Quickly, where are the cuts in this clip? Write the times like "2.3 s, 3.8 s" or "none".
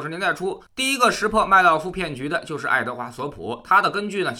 none